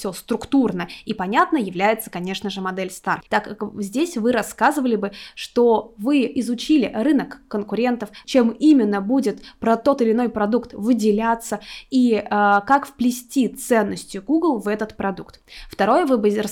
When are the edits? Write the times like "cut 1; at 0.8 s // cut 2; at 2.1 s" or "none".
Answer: cut 1; at 3.3 s // cut 2; at 8.2 s